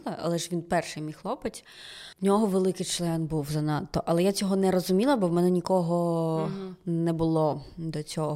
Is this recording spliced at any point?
yes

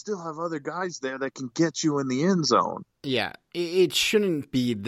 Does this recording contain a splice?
no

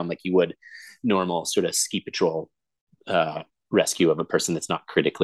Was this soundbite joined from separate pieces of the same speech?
no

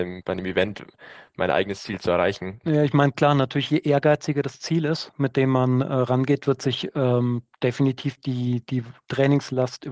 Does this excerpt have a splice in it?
yes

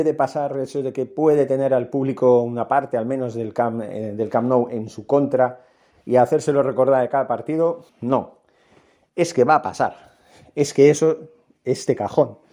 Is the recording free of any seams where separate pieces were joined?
no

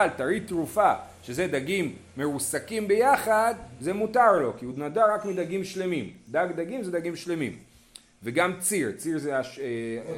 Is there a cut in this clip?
no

